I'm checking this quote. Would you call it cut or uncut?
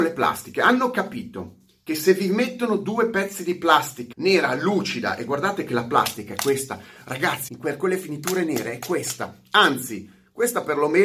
cut